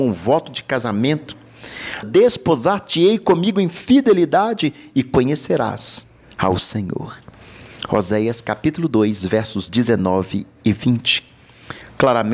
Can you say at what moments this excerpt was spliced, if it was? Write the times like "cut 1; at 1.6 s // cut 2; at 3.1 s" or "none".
cut 1; at 2.0 s